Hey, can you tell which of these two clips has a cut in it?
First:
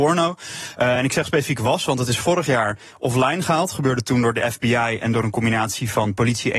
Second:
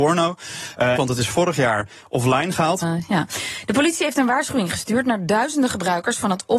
second; 2 cuts; at 1.0 s, 2.8 s

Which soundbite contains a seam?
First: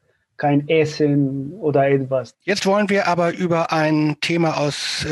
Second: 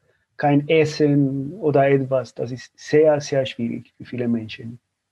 first; 1 cut; at 2.3 s

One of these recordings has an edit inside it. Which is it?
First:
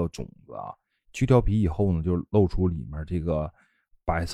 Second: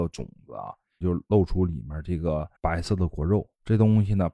second; 2 cuts; at 1.0 s, 2.6 s

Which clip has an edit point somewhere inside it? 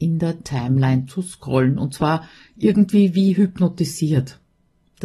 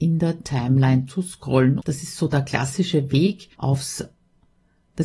second; 2 cuts; at 1.8 s, 3.5 s

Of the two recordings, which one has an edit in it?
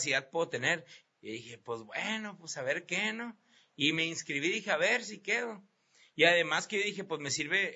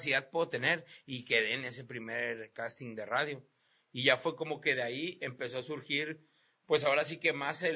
first; 1 cut; at 1.0 s

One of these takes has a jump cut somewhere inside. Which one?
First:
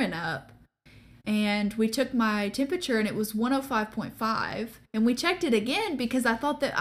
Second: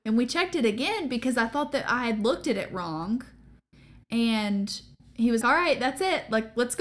second; 1 cut; at 5.4 s

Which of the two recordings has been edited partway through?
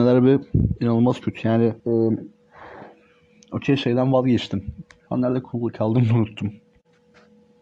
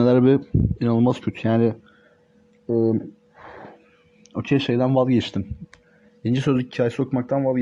first; 2 cuts; at 1.8 s, 5.1 s

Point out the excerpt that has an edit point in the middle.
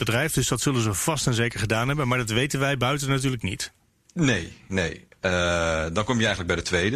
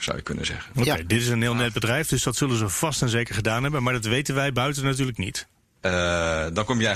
second; 1 cut; at 5.8 s

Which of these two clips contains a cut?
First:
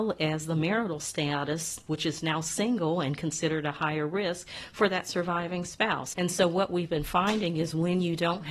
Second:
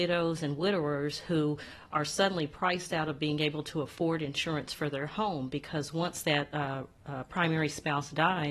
first; 1 cut; at 6.1 s

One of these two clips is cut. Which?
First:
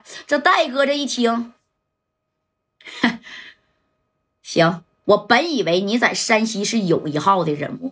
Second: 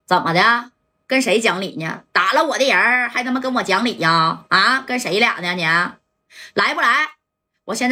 first; 1 cut; at 5.0 s

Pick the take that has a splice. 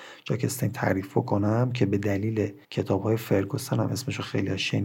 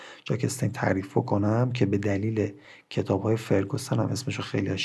first; 1 cut; at 2.6 s

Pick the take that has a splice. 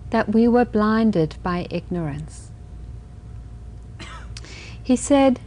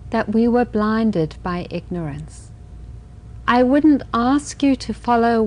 second; 1 cut; at 3.4 s

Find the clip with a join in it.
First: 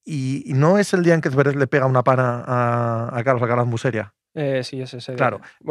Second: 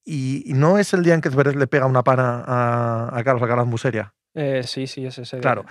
first; 1 cut; at 4.6 s

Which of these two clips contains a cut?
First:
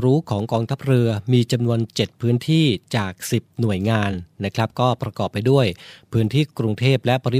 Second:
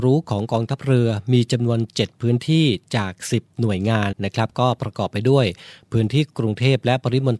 second; 1 cut; at 4.1 s

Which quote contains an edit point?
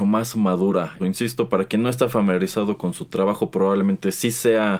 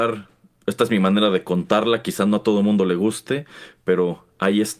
first; 1 cut; at 1.0 s

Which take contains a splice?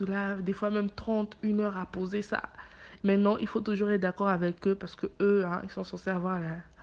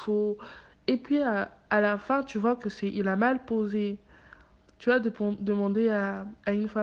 first; 1 cut; at 3.0 s

